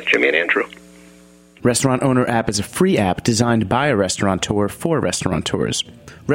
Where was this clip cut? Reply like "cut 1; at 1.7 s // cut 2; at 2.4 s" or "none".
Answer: cut 1; at 1.6 s